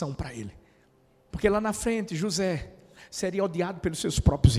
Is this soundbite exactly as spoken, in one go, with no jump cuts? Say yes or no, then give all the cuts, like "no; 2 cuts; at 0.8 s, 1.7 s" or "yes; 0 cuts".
no; 1 cut; at 1.3 s